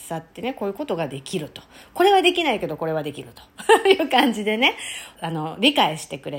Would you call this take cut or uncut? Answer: cut